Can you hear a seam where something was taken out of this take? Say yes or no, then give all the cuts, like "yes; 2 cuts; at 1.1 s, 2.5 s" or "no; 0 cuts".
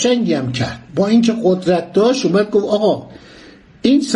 no; 0 cuts